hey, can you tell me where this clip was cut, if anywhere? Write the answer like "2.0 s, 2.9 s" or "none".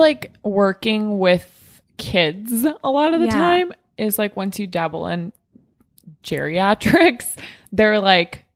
none